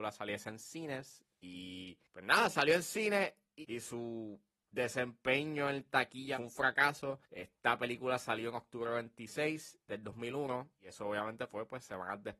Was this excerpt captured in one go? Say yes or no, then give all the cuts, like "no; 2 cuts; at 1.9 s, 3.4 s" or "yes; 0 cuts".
no; 3 cuts; at 2.1 s, 7.3 s, 9.9 s